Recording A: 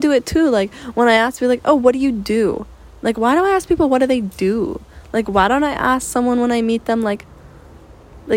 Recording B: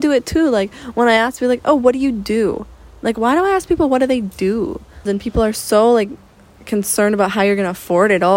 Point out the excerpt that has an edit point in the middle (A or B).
B